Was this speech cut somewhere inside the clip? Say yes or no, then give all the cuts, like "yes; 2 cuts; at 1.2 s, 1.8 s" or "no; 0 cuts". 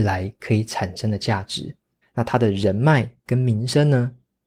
yes; 1 cut; at 2.0 s